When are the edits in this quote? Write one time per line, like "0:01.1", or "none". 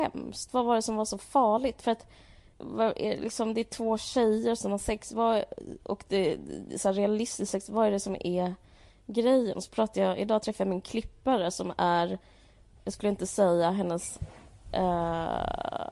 none

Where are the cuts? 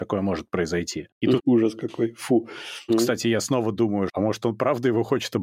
0:01.4
0:02.9
0:04.1

